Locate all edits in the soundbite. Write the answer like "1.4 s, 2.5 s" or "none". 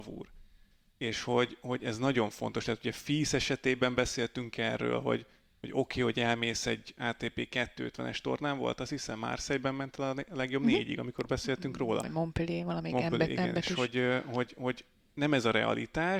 none